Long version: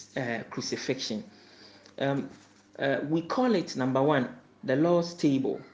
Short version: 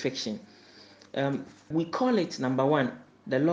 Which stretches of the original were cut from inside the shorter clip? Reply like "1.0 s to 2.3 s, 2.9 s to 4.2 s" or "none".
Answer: 2.5 s to 3.1 s